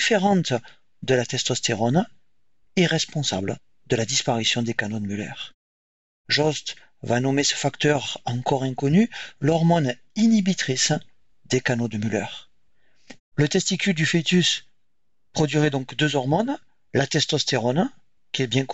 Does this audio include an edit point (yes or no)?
yes